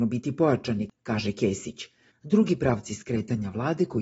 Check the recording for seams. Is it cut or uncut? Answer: cut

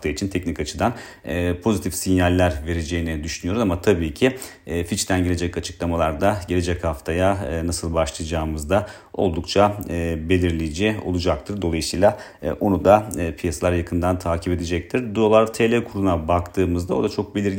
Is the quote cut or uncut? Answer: uncut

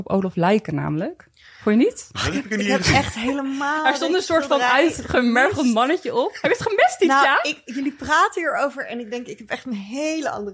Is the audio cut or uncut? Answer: uncut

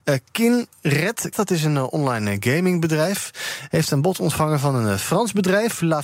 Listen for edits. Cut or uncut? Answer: cut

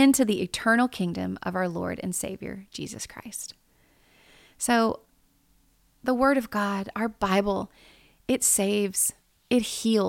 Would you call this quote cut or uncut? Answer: uncut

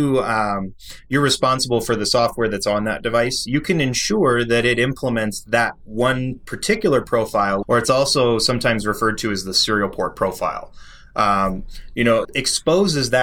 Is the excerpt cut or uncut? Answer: cut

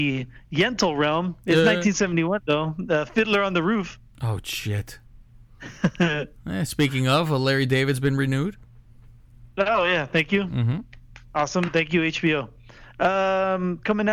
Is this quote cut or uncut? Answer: uncut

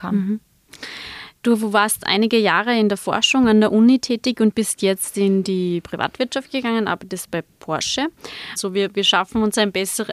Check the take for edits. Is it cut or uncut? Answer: cut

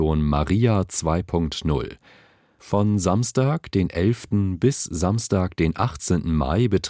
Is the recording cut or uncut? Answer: uncut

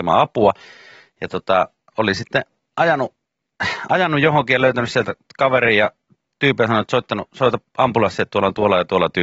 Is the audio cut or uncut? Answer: uncut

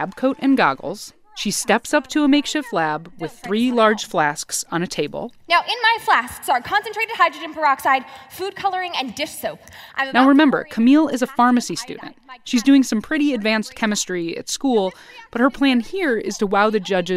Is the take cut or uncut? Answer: uncut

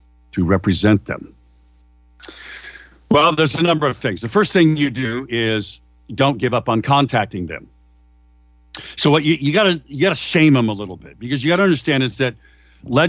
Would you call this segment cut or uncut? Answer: uncut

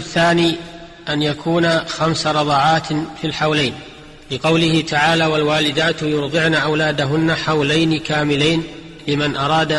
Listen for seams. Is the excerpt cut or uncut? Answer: uncut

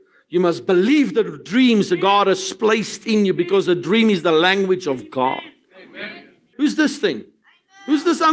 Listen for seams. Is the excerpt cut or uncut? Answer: cut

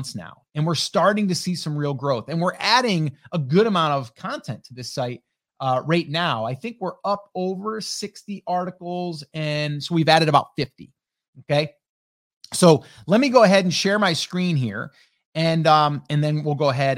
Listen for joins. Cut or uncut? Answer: uncut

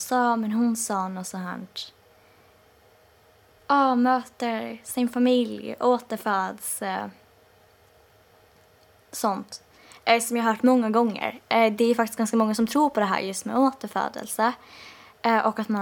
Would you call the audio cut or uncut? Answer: uncut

